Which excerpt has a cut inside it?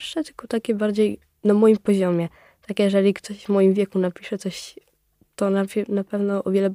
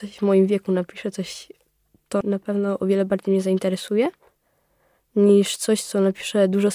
second; 1 cut; at 2.2 s

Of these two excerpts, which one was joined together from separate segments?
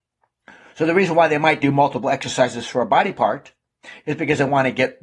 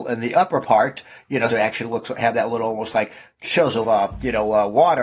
second; 2 cuts; at 1.5 s, 3.8 s

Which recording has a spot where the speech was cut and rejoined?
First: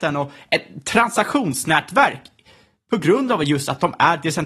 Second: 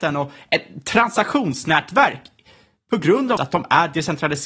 second; 1 cut; at 3.4 s

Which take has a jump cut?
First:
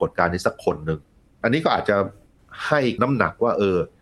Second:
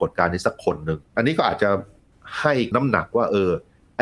second; 1 cut; at 1.1 s

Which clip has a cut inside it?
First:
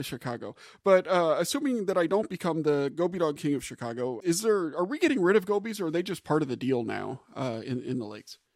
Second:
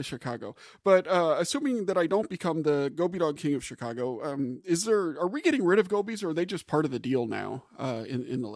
first; 1 cut; at 4.2 s

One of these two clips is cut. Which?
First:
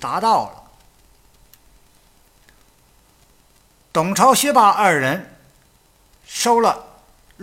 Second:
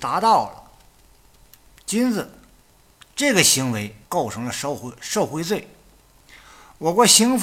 second; 2 cuts; at 1.8 s, 4.0 s

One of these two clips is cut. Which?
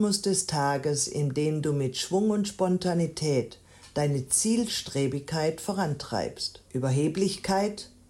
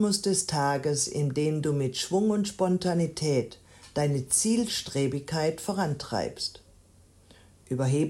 first; 1 cut; at 6.7 s

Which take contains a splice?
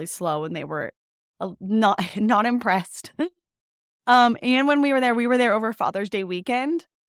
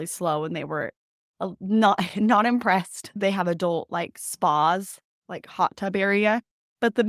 second; 1 cut; at 3.2 s

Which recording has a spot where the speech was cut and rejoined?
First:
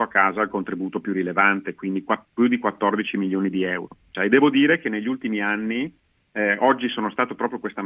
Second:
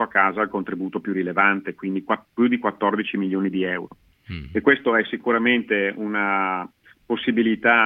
first; 1 cut; at 4.1 s

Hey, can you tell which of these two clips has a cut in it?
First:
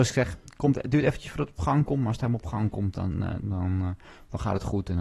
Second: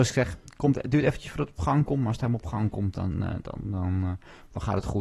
first; 1 cut; at 3.4 s

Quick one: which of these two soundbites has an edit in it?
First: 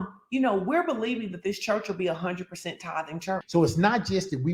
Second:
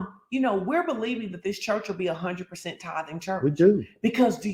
first; 1 cut; at 3.4 s

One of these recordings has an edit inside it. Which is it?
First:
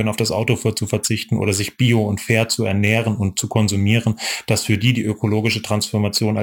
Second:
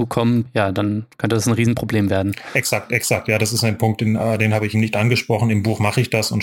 second; 1 cut; at 4.7 s

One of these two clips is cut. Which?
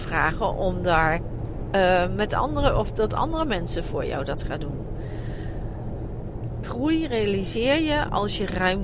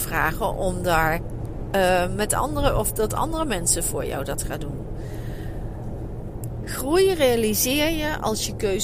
first; 1 cut; at 6.6 s

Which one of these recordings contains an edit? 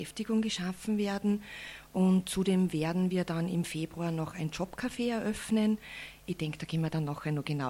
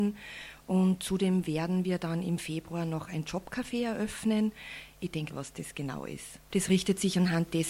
second; 2 cuts; at 5.3 s, 6.5 s

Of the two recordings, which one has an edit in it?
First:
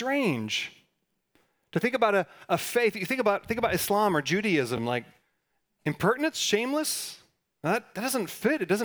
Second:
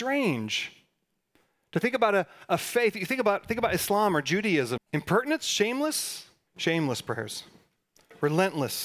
second; 2 cuts; at 4.8 s, 6.5 s

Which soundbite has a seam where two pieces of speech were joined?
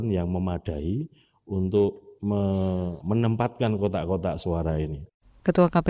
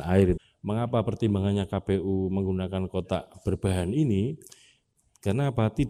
first; 1 cut; at 3.0 s

